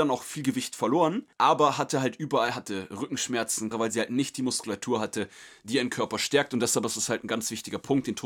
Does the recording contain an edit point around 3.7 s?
yes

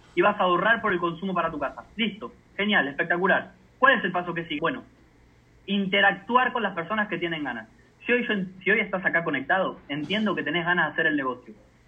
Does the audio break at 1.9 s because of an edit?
no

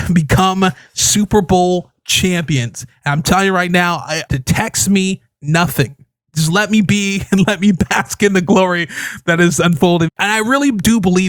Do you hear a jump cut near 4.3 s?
yes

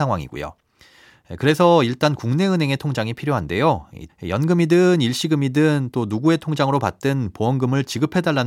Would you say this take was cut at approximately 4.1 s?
yes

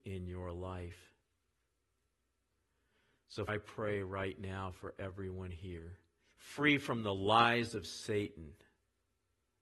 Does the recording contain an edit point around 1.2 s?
no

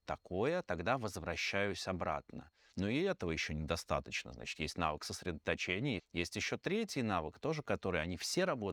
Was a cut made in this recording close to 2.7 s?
yes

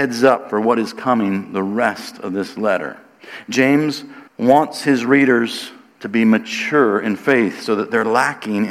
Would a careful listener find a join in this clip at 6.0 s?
no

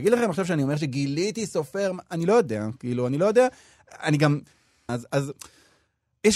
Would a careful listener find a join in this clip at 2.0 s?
no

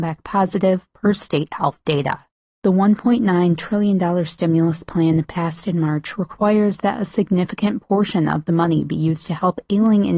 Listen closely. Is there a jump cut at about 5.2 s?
no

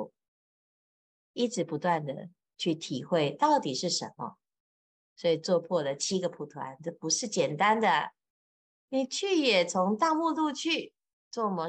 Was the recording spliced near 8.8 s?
yes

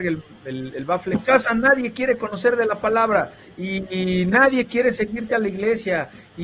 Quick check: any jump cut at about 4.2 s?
no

